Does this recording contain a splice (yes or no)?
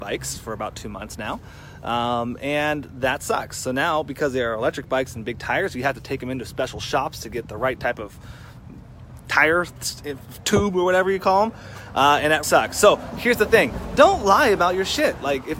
yes